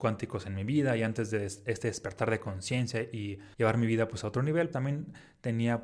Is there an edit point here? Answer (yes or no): yes